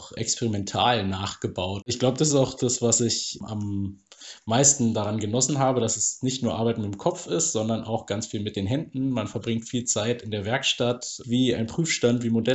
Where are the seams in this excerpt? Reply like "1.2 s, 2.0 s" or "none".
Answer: 1.8 s, 11.2 s